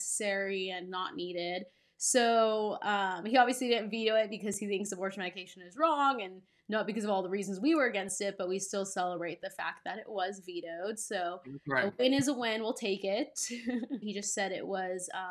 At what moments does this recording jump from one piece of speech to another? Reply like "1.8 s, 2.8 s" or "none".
14.0 s